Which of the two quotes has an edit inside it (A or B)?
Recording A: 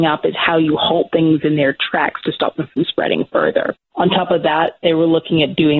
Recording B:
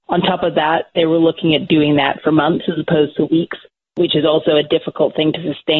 A